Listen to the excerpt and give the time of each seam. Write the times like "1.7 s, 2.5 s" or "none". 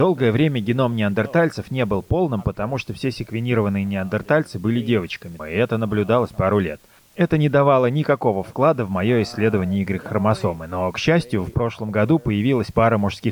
5.4 s, 7.0 s